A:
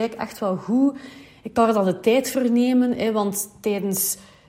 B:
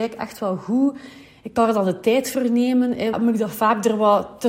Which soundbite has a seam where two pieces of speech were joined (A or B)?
B